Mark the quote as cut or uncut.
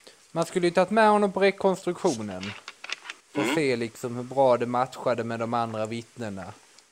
cut